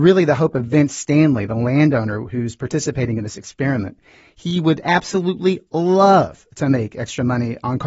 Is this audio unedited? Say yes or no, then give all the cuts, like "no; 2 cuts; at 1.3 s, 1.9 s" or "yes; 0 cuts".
yes; 0 cuts